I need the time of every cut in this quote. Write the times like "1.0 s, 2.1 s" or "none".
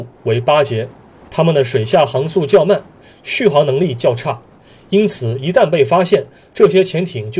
1.3 s